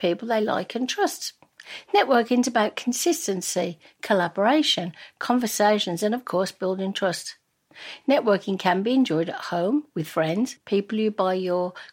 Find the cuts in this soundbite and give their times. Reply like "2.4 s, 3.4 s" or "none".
8.0 s, 10.6 s